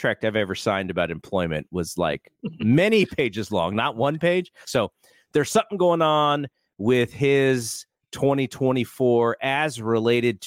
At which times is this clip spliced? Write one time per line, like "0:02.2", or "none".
0:04.6